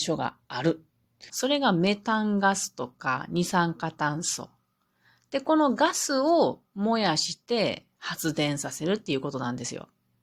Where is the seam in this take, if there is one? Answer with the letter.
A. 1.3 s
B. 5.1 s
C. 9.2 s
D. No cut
A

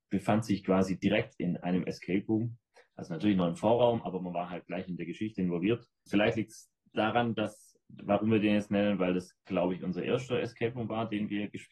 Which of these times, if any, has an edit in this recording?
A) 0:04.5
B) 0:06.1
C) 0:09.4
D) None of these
B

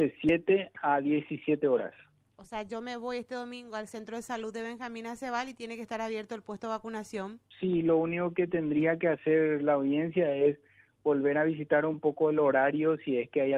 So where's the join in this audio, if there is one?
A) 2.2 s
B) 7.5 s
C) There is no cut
B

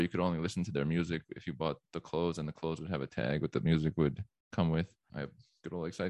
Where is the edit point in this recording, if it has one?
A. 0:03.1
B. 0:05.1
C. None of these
B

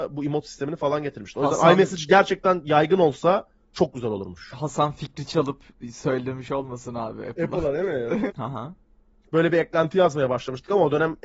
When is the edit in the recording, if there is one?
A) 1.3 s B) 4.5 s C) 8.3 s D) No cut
C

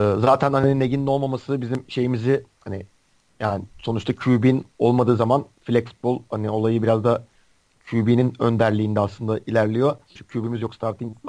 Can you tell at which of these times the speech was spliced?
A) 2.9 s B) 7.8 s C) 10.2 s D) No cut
C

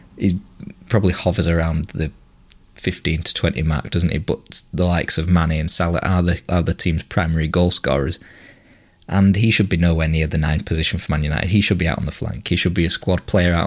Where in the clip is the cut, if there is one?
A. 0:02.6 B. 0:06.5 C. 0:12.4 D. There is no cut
B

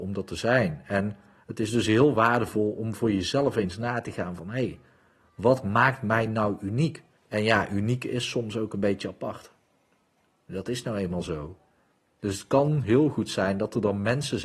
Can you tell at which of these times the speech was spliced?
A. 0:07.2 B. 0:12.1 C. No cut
A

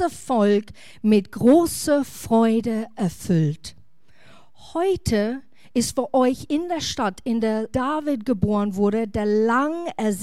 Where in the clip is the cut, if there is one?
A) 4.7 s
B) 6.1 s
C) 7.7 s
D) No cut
C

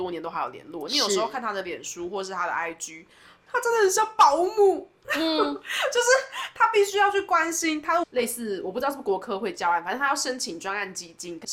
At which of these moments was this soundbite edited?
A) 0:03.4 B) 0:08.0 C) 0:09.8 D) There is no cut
B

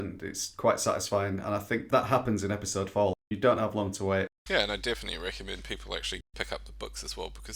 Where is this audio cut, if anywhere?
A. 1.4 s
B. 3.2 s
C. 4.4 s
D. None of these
D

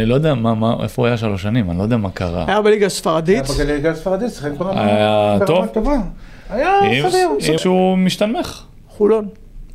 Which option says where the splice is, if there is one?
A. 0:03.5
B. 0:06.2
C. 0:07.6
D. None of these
C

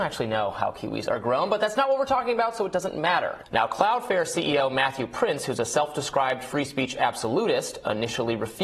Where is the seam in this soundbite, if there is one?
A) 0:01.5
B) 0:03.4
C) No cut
B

